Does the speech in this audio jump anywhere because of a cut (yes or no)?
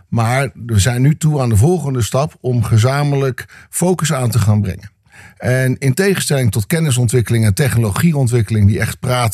no